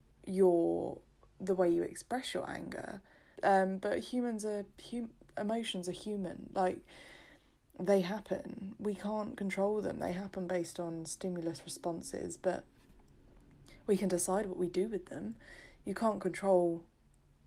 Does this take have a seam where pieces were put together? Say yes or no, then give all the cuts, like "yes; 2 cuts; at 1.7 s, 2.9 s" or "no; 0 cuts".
yes; 1 cut; at 3.4 s